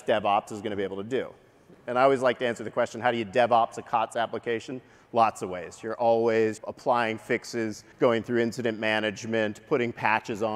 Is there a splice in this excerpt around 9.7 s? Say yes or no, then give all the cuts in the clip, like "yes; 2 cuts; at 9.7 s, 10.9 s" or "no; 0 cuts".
no; 2 cuts; at 6.6 s, 7.9 s